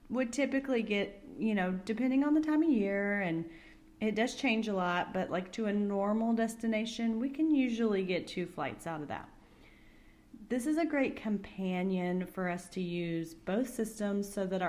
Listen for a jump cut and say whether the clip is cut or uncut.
uncut